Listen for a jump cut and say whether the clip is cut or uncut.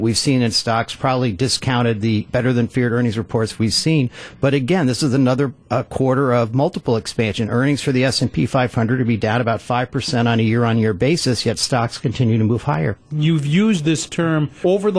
uncut